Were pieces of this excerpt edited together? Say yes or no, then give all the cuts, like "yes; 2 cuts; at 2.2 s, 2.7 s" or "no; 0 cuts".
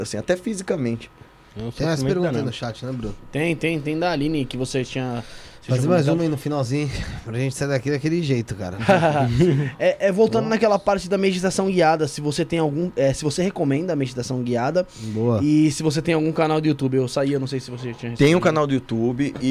no; 0 cuts